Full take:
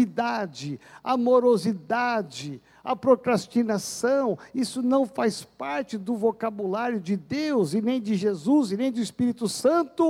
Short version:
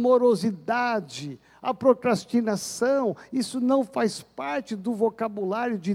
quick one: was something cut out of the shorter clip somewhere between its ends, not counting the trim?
no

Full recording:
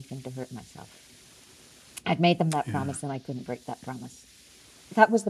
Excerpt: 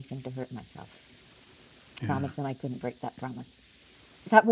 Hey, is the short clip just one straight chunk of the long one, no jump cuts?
no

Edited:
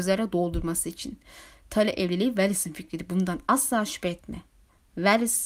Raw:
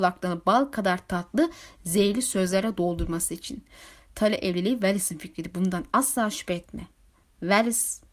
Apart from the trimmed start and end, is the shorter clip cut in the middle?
no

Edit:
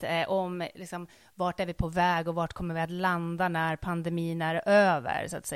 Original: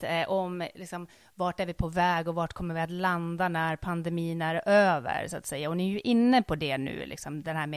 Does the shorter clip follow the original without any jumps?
yes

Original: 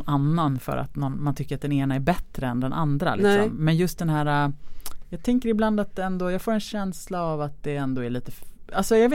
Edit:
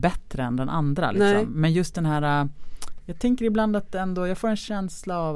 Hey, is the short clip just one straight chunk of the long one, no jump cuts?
yes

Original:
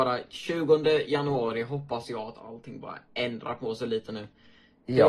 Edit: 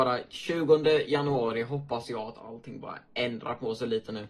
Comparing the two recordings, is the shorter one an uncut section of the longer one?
yes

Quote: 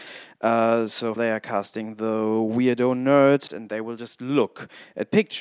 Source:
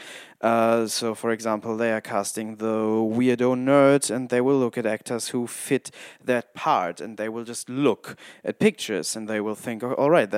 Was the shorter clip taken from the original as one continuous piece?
no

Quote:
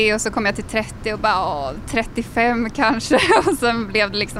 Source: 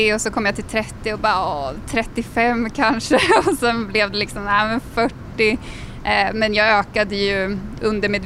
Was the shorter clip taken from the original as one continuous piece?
yes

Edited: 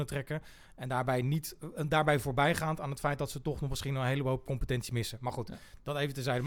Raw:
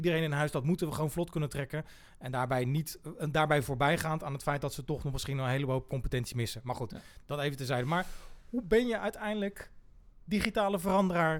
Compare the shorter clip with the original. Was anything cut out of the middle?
no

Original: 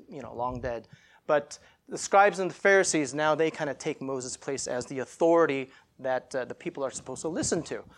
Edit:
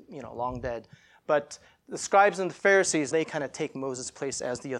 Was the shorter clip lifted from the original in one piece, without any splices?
no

